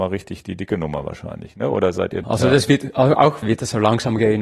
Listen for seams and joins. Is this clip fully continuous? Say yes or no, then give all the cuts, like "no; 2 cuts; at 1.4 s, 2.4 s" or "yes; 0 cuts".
no; 2 cuts; at 2.2 s, 3.4 s